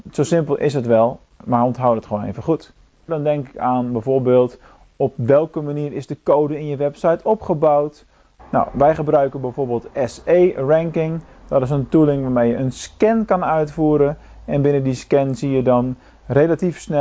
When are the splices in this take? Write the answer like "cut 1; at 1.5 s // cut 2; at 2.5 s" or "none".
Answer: cut 1; at 3.1 s // cut 2; at 8.4 s